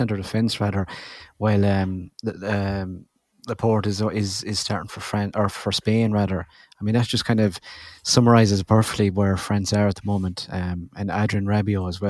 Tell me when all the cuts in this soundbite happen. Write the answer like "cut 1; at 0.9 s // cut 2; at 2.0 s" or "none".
none